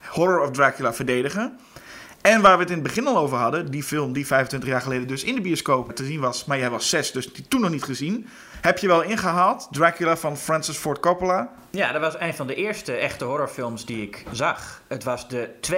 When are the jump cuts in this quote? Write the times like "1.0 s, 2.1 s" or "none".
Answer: 5.9 s